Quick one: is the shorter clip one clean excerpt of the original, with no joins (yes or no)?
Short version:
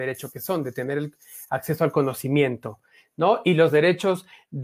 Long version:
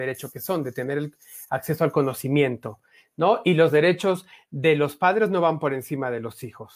yes